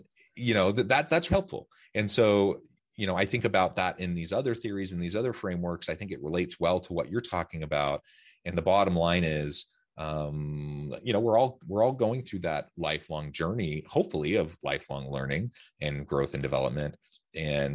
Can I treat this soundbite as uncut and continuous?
no; 1 cut; at 1.3 s

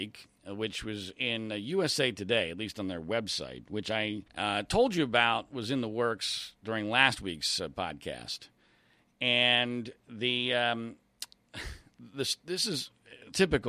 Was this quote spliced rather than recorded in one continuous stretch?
yes; 1 cut; at 4.3 s

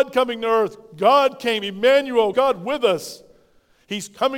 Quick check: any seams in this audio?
yes; 1 cut; at 2.3 s

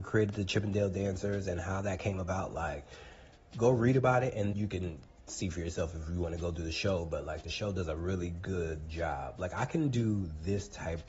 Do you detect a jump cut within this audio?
yes; 1 cut; at 4.5 s

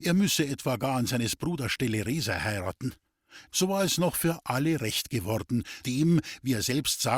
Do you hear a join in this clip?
yes; 2 cuts; at 3.5 s, 5.8 s

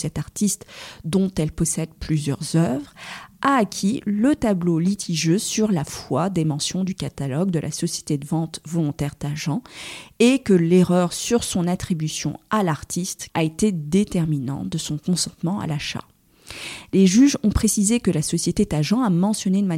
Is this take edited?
yes; 1 cut; at 13.3 s

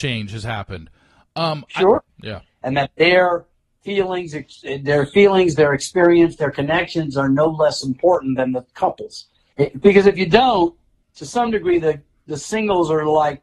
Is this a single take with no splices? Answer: no; 3 cuts; at 2.1 s, 9.5 s, 11.0 s

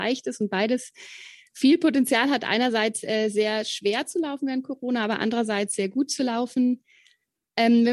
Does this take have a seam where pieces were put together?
no; 0 cuts

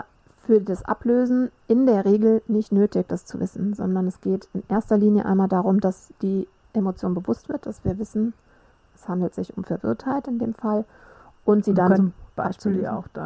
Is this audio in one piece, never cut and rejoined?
no; 1 cut; at 11.9 s

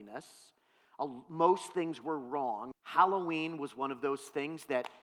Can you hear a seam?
yes; 1 cut; at 2.7 s

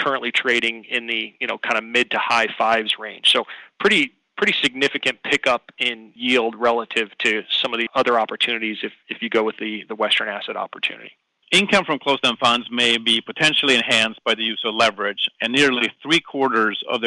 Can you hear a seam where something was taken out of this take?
yes; 1 cut; at 11.4 s

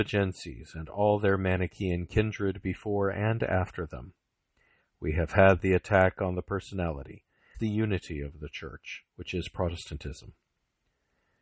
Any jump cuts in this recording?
yes; 2 cuts; at 7.5 s, 9.1 s

